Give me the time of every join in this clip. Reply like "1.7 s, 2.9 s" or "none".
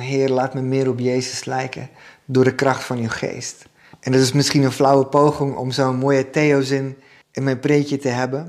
3.9 s, 7.2 s